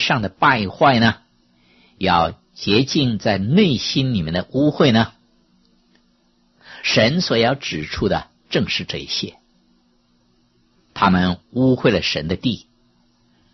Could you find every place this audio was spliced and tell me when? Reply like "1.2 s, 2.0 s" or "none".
none